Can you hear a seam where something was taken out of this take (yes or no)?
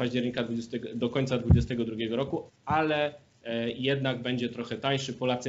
yes